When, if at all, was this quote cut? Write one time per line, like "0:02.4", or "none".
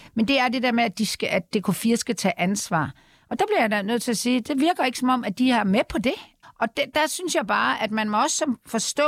0:06.4